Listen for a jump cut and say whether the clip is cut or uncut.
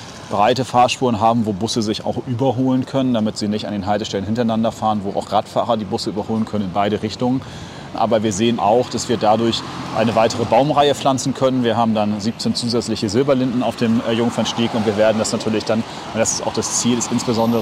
cut